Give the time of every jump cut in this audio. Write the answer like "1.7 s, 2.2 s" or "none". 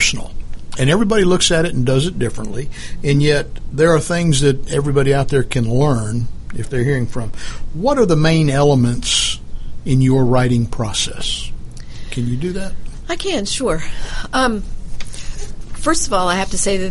none

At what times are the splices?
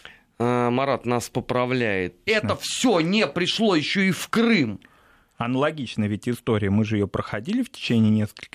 2.3 s

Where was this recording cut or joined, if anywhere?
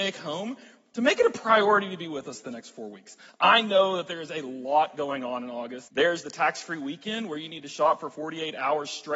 5.9 s

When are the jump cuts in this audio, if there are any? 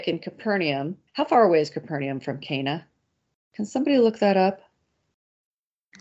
1.1 s

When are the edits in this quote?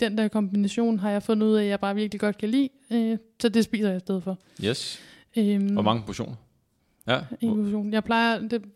7.1 s

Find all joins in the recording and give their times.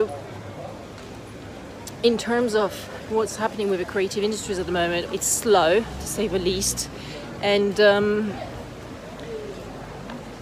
5.1 s

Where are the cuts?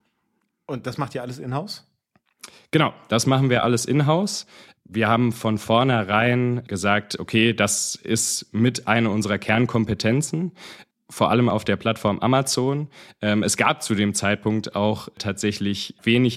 none

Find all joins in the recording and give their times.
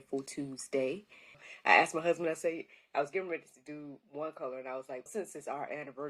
1.3 s, 5.1 s

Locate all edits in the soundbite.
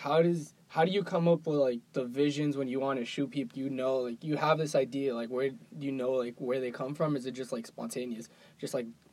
1.8 s, 3.5 s

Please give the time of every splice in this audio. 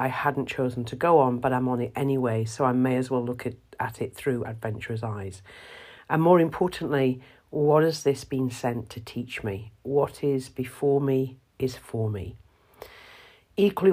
none

